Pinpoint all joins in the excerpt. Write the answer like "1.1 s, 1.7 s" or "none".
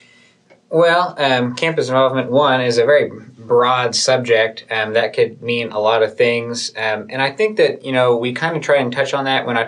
none